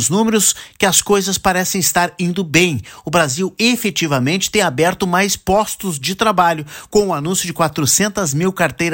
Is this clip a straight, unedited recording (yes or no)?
yes